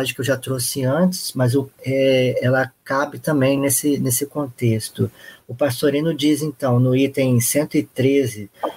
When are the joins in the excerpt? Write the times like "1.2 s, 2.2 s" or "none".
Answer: none